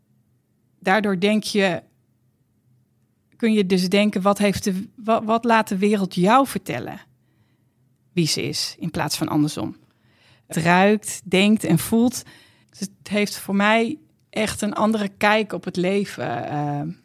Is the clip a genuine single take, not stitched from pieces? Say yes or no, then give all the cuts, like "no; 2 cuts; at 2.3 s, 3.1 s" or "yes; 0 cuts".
no; 2 cuts; at 10.5 s, 12.6 s